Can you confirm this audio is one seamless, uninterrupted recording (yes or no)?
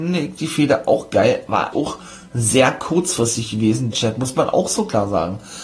no